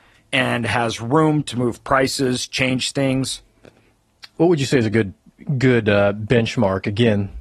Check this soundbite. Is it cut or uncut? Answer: uncut